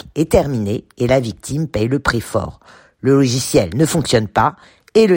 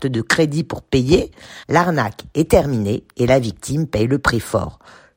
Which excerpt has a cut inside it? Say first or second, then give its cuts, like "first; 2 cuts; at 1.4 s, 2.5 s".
second; 1 cut; at 1.6 s